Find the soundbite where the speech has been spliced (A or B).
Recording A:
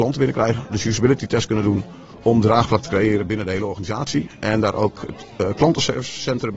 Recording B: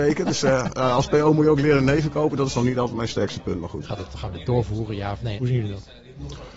B